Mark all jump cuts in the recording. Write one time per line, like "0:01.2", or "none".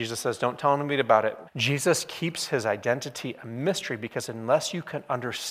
0:01.5